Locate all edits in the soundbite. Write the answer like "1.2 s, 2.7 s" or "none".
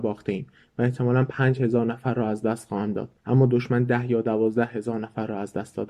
3.2 s